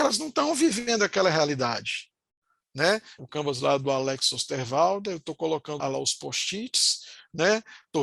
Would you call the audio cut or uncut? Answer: cut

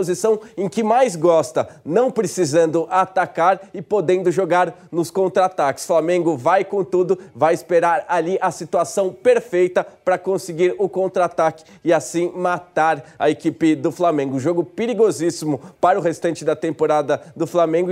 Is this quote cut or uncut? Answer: cut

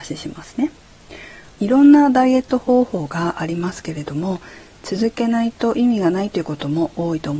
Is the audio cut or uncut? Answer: cut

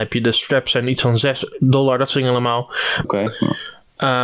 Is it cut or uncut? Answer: cut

